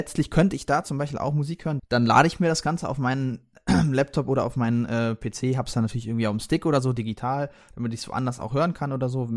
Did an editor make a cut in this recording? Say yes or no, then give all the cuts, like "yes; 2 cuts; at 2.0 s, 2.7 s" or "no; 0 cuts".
yes; 1 cut; at 1.8 s